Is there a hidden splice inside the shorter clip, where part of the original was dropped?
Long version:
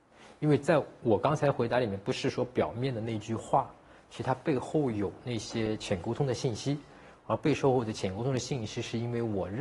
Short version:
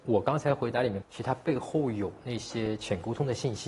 yes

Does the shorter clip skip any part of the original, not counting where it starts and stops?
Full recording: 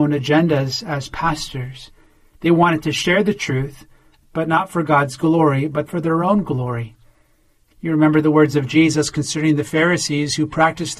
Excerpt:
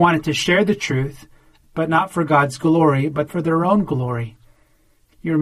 no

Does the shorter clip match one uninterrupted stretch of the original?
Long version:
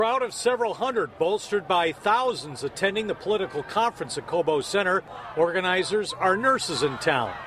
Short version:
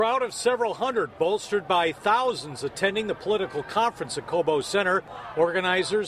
yes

